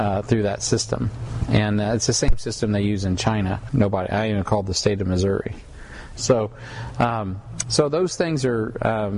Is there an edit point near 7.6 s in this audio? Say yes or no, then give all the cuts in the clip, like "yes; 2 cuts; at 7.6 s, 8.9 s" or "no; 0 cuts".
no; 2 cuts; at 3.7 s, 6.2 s